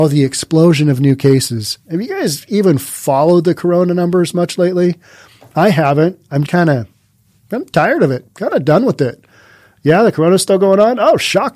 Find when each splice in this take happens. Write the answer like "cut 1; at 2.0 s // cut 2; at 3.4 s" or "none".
cut 1; at 6.5 s